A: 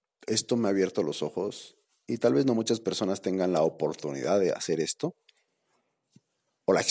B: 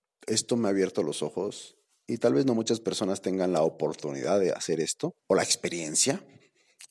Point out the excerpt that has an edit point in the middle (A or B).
B